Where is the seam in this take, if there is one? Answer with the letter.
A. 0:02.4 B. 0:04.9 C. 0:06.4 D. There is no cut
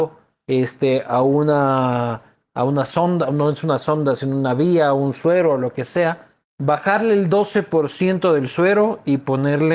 C